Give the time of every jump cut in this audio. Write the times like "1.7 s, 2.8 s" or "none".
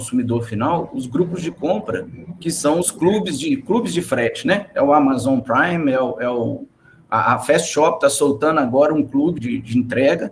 9.4 s